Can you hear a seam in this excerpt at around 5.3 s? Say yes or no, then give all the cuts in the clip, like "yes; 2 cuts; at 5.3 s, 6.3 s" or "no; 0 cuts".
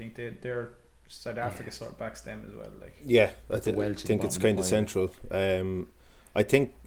no; 0 cuts